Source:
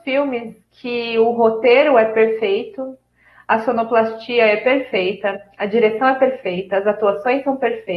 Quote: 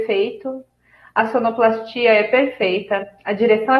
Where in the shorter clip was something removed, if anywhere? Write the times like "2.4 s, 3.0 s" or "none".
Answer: none

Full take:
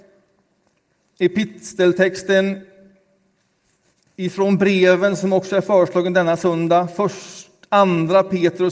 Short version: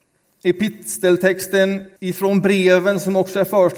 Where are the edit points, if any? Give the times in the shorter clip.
2.0 s

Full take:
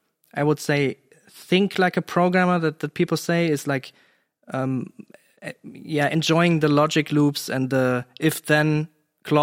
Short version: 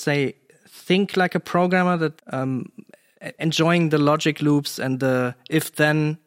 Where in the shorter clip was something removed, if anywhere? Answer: 2.2 s, 3.4 s

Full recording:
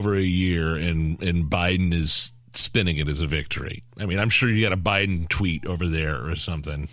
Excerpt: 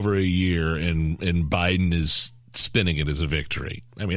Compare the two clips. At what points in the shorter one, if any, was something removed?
none

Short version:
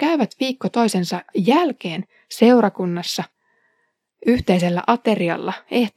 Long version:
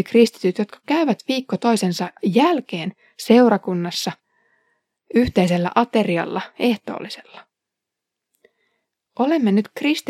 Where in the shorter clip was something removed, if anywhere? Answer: none

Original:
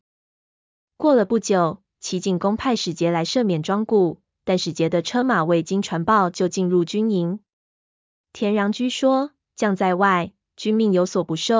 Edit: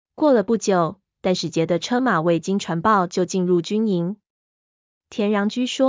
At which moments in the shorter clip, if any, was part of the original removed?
1.1 s

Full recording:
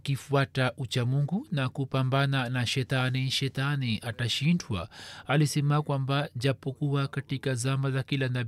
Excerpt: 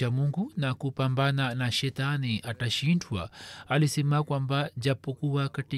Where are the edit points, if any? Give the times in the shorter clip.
1.7 s

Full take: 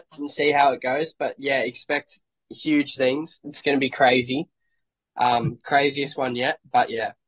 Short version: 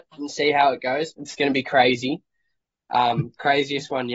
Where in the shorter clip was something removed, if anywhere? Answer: 1.1 s

